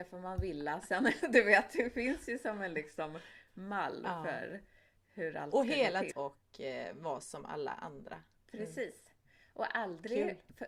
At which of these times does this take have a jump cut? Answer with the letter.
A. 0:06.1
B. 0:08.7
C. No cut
A